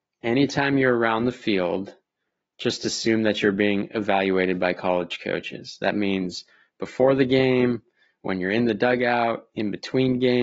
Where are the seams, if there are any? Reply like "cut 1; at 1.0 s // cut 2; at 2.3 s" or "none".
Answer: none